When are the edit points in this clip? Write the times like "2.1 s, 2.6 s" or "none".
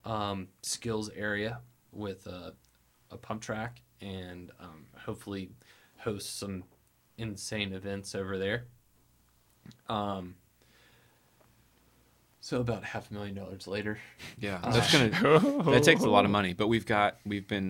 none